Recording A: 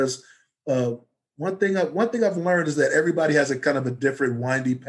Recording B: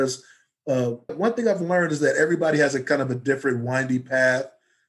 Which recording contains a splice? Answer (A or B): B